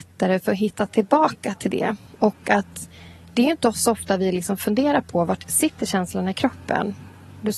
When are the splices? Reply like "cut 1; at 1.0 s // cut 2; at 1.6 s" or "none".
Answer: none